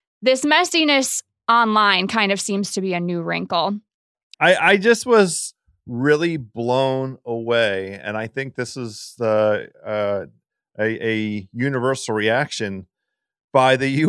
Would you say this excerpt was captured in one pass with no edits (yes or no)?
no